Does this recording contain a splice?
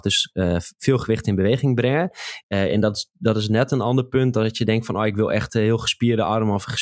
yes; 1 cut; at 2.4 s

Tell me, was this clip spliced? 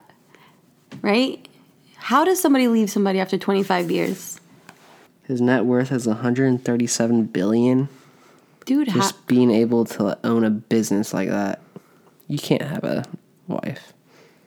yes; 1 cut; at 5.1 s

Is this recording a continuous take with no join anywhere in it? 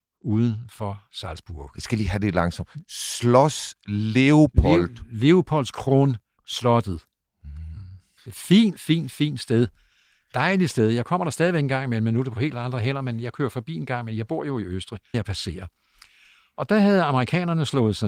no; 2 cuts; at 8.2 s, 15.1 s

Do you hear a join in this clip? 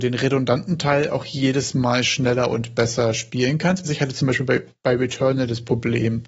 yes; 1 cut; at 3.8 s

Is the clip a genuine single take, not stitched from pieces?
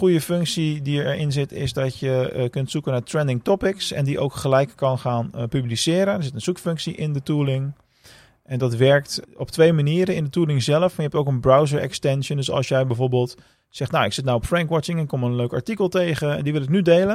no; 1 cut; at 9.2 s

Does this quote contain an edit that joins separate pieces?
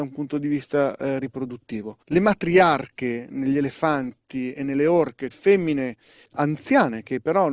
yes; 2 cuts; at 2.0 s, 5.3 s

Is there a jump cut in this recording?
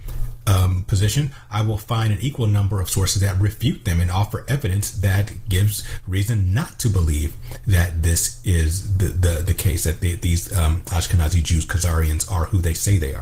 no; 0 cuts

